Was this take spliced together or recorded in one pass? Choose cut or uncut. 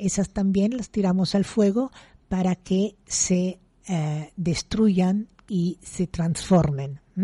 uncut